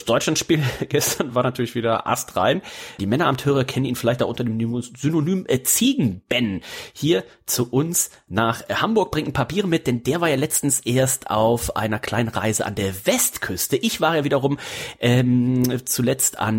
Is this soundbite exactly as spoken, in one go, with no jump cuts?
no; 1 cut; at 3.0 s

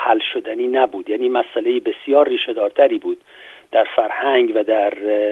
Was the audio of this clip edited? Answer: no; 0 cuts

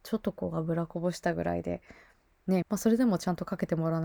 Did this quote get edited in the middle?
yes; 1 cut; at 2.6 s

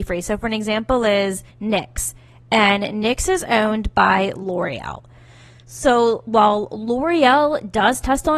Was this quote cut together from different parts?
yes; 1 cut; at 1.5 s

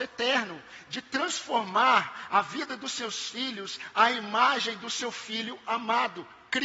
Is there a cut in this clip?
no; 0 cuts

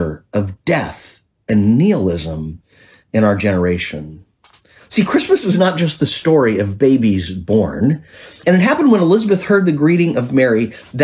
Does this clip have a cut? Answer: yes; 1 cut; at 8.4 s

